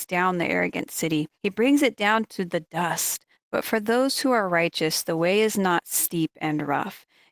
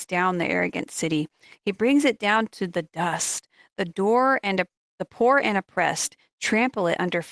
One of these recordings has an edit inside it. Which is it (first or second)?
first